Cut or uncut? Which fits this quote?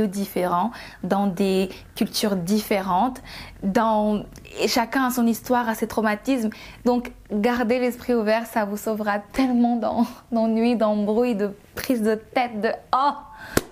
uncut